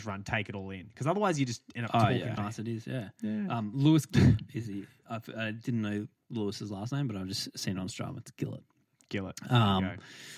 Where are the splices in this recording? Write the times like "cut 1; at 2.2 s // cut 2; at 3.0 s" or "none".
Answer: cut 1; at 2.4 s